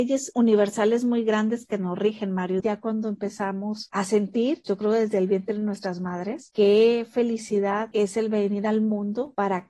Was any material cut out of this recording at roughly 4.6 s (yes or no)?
no